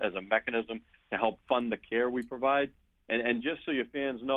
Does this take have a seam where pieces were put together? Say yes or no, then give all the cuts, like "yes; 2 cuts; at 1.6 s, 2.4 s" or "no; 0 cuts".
no; 0 cuts